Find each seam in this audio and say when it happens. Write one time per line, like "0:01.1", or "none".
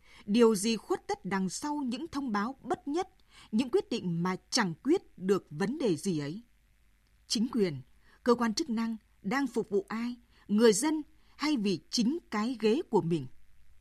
none